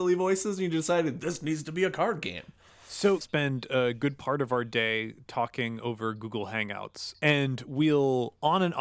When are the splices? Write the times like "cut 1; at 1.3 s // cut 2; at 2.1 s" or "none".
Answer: cut 1; at 3.2 s